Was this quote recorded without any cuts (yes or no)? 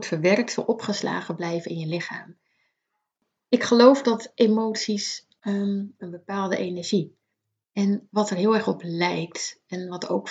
no